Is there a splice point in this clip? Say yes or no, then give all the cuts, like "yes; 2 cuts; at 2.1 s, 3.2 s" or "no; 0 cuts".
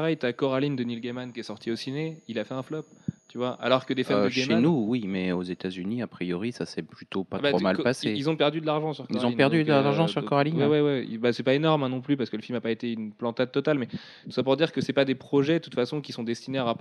no; 0 cuts